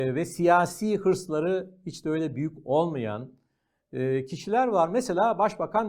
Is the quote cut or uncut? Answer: uncut